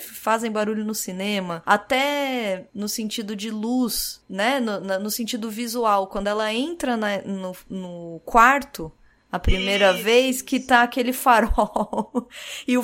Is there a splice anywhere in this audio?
no; 0 cuts

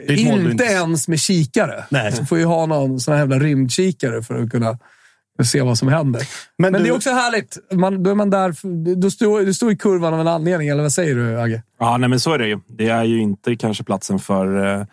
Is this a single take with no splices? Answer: yes; 0 cuts

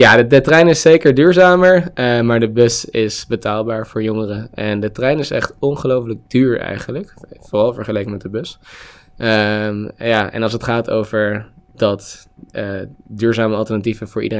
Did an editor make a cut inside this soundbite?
no; 0 cuts

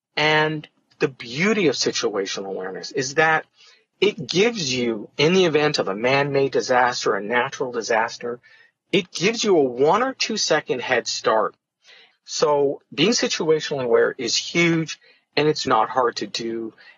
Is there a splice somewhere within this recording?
yes; 2 cuts; at 12.1 s, 15.7 s

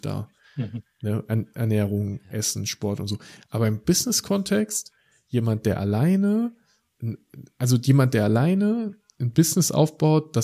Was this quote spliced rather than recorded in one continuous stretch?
no; 0 cuts

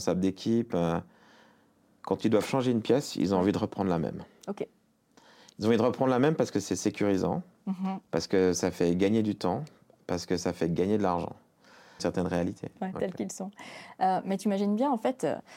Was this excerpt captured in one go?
no; 1 cut; at 12.0 s

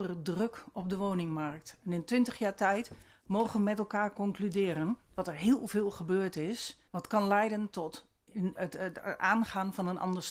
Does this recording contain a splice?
yes; 2 cuts; at 6.9 s, 8.5 s

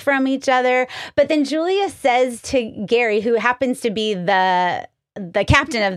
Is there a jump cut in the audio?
no; 0 cuts

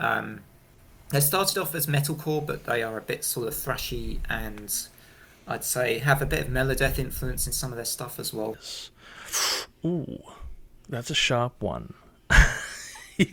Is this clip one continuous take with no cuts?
no; 1 cut; at 8.5 s

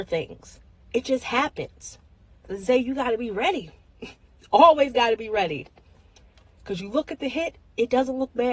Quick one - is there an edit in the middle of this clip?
no; 0 cuts

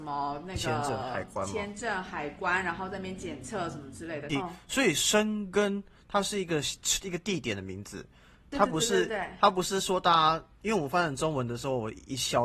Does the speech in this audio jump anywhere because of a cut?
yes; 1 cut; at 4.3 s

